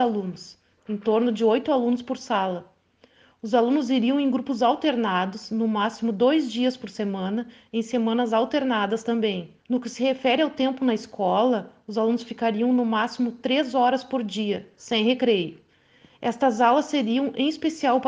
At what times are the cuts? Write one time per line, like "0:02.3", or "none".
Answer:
0:09.6